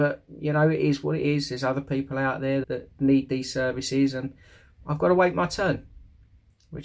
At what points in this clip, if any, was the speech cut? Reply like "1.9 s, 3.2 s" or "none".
2.6 s

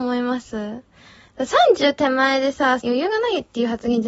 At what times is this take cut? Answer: 2.8 s

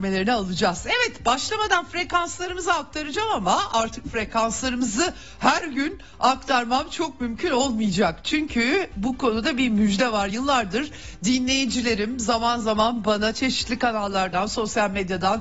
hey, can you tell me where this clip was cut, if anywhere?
none

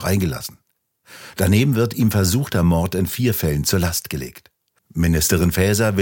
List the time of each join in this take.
1.3 s, 4.8 s

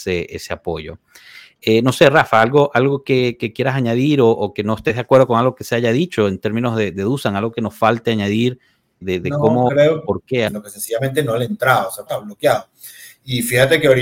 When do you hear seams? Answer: 9.0 s, 10.5 s, 12.1 s

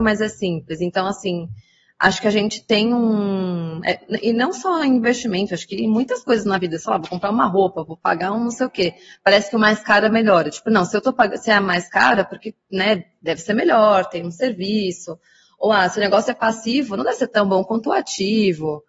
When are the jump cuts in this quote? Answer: none

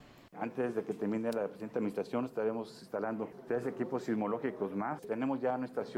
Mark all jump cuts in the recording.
5.0 s

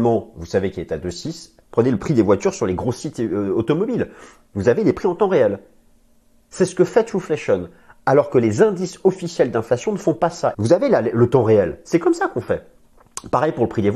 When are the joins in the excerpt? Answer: 1.6 s, 10.5 s

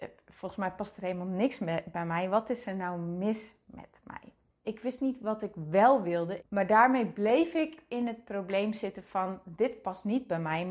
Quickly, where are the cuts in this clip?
4.6 s, 6.4 s

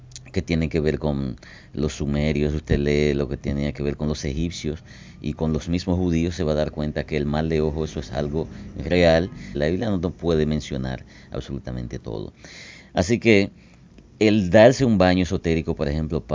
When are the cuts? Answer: 9.5 s

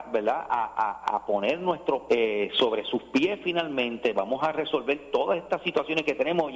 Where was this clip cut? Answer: 2.1 s

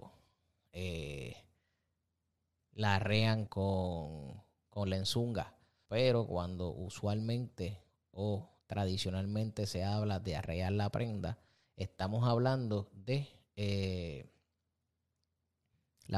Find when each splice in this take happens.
3.5 s, 5.9 s

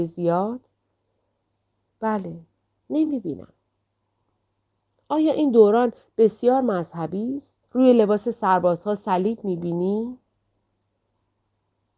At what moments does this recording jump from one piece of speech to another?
2.8 s, 7.6 s

